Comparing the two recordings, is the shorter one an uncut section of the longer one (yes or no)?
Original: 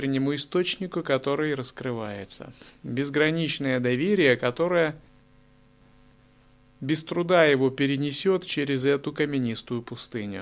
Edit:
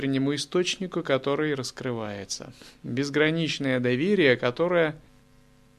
yes